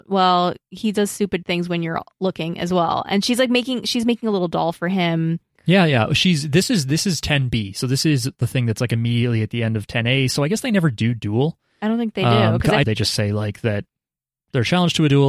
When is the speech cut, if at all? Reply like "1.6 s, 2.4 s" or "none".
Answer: 5.6 s, 12.8 s